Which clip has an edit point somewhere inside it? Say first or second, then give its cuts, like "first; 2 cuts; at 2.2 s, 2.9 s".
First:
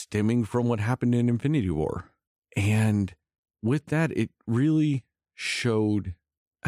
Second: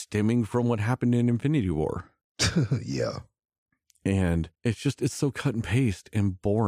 second; 2 cuts; at 2.2 s, 4.5 s